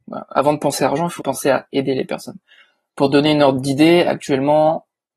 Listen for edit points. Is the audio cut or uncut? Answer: cut